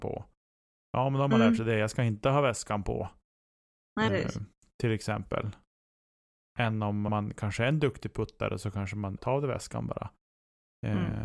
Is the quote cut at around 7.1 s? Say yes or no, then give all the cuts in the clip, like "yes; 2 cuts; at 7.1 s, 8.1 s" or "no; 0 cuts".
yes; 3 cuts; at 4.1 s, 7.1 s, 9.2 s